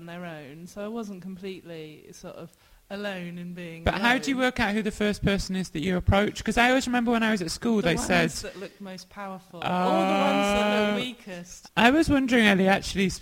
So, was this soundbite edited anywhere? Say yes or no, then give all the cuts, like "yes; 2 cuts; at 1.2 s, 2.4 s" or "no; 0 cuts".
yes; 1 cut; at 11.7 s